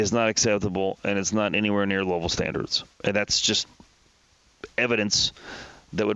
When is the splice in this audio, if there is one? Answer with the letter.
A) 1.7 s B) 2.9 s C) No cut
B